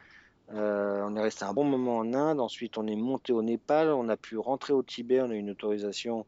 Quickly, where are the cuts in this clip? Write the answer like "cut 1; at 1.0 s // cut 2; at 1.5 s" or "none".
cut 1; at 1.6 s